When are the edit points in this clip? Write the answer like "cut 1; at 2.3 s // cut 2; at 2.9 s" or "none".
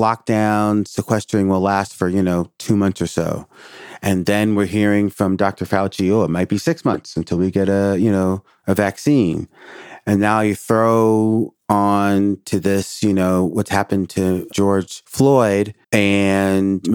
cut 1; at 15.8 s